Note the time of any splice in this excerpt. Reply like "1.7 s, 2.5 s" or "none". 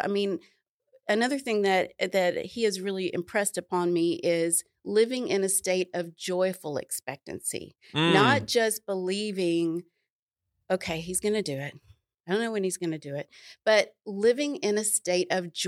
none